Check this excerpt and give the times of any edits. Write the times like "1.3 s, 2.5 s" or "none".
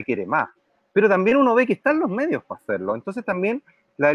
none